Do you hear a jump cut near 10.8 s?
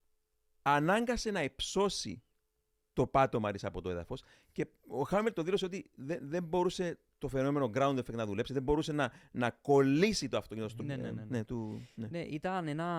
yes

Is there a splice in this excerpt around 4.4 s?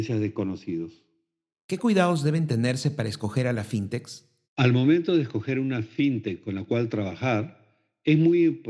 yes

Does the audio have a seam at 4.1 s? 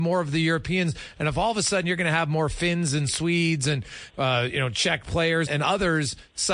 yes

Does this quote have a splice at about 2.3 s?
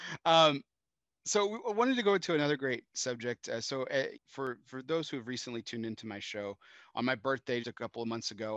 no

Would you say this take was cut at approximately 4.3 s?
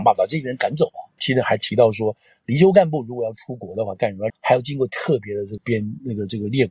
yes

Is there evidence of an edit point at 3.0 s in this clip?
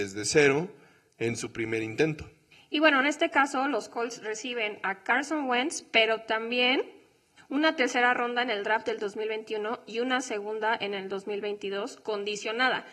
no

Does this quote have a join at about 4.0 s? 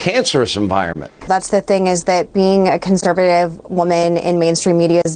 no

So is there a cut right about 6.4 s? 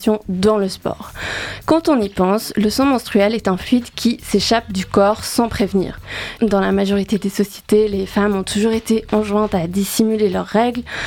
yes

